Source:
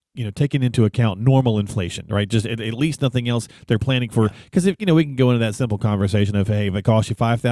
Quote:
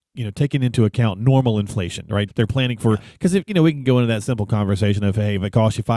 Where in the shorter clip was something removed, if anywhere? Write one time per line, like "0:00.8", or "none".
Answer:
0:02.3